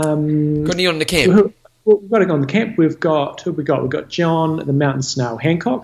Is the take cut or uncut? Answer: uncut